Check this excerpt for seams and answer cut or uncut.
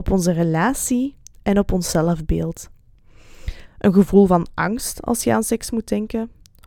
cut